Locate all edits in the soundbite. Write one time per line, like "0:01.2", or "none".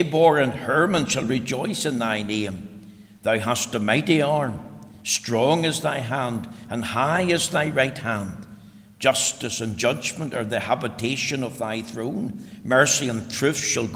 none